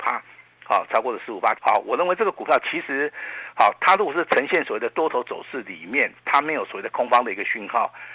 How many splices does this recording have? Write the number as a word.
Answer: one